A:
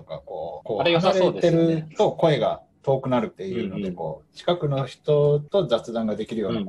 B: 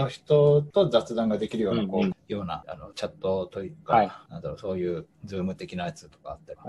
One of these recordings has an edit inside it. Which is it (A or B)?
B